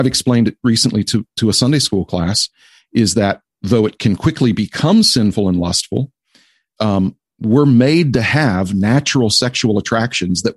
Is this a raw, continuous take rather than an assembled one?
no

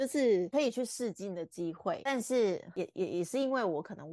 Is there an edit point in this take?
no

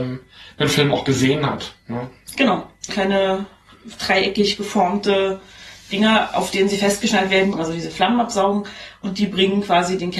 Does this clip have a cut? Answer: yes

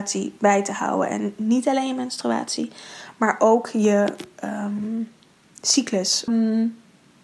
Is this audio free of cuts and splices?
no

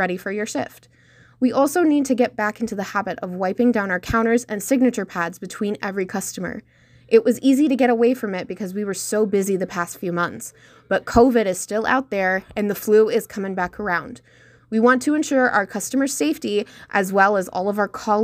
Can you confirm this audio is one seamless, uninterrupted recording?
yes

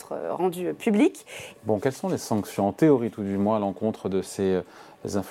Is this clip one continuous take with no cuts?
no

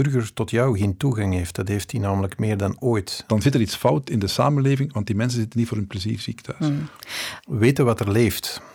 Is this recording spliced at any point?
yes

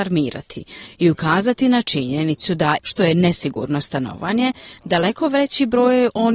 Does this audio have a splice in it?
yes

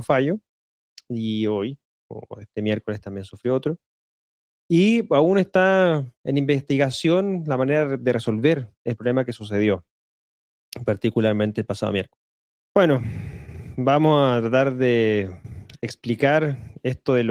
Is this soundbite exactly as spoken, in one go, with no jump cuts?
no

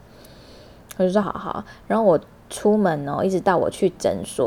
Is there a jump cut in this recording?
yes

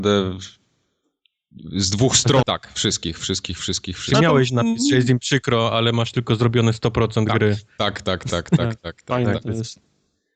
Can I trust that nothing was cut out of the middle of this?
no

